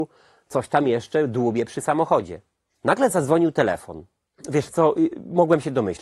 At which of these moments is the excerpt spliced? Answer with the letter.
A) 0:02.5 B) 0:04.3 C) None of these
B